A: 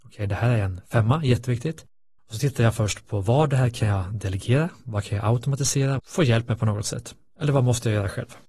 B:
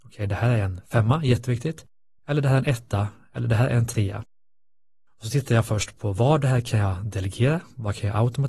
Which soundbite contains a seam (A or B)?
A